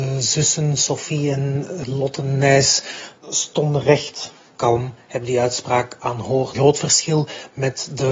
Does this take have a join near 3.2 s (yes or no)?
yes